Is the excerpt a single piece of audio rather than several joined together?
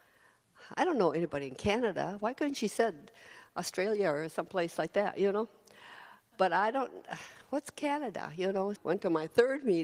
no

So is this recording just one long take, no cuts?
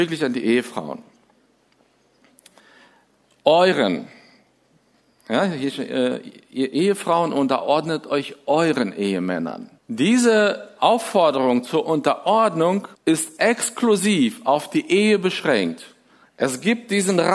no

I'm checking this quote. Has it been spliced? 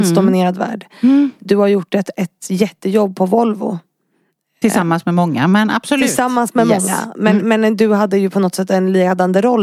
no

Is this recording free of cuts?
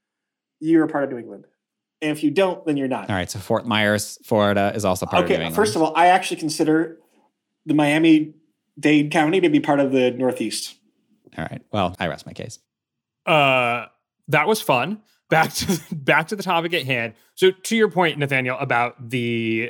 no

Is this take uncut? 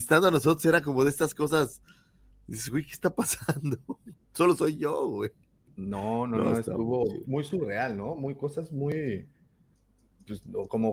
yes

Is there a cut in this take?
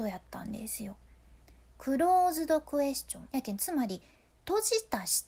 yes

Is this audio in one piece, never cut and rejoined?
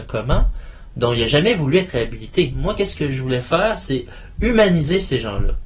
yes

